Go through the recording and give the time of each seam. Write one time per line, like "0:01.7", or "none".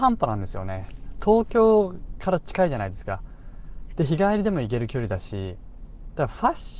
none